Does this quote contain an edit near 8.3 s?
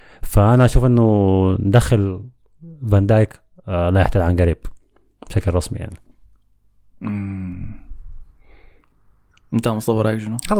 no; 0 cuts

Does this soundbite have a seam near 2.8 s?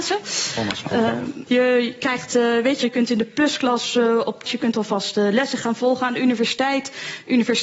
yes; 3 cuts; at 1.5 s, 2.8 s, 4.5 s

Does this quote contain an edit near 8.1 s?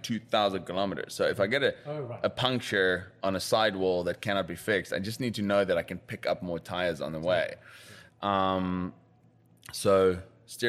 yes; 1 cut; at 8.1 s

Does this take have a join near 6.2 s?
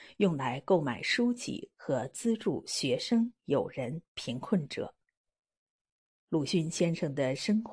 no; 0 cuts

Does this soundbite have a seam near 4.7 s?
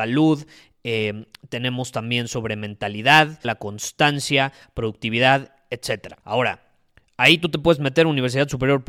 no; 2 cuts; at 3.4 s, 6.2 s

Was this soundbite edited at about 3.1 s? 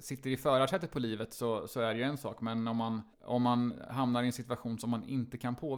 yes; 1 cut; at 3.1 s

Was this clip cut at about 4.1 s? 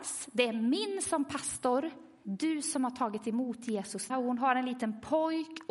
yes; 2 cuts; at 2.2 s, 4.1 s

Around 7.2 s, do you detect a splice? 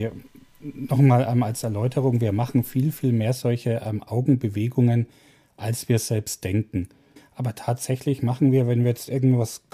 yes; 1 cut; at 7.2 s

